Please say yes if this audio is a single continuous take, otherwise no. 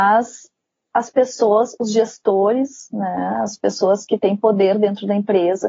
yes